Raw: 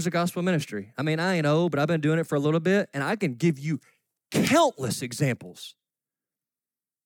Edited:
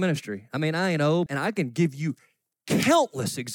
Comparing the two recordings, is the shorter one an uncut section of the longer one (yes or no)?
no